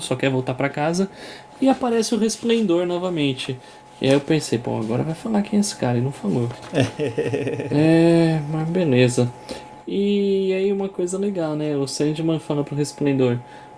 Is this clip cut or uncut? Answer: uncut